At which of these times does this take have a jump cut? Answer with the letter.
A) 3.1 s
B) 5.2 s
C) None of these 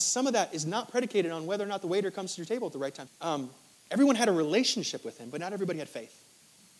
A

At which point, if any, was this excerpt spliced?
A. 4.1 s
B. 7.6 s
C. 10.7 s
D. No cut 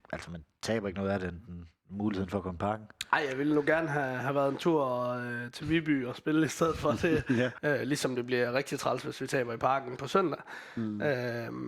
B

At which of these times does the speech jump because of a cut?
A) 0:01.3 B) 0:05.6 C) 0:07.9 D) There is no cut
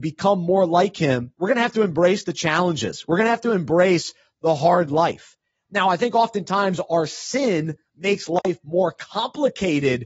A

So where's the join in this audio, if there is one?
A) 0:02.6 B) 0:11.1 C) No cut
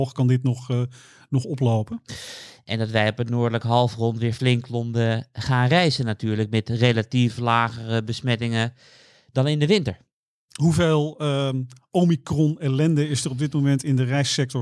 A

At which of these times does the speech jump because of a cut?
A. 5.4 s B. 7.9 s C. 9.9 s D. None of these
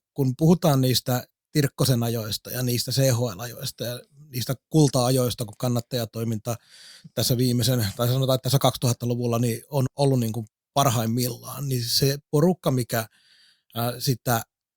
C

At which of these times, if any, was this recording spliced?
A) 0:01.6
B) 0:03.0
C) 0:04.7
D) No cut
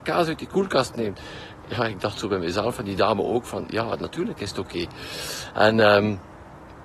D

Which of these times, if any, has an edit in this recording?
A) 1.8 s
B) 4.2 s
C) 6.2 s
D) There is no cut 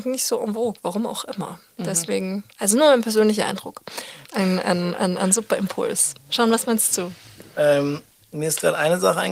B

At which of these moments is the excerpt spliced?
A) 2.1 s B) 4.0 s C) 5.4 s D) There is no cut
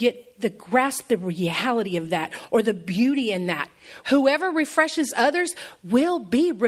B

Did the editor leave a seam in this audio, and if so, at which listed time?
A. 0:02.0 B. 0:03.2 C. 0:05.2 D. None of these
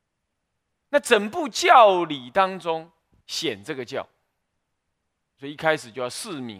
B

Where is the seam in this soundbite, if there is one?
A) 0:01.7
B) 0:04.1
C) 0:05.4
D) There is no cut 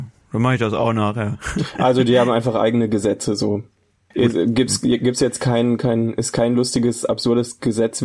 B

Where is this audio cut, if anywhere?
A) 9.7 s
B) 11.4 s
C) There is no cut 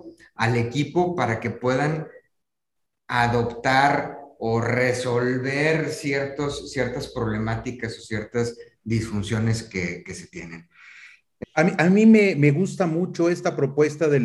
B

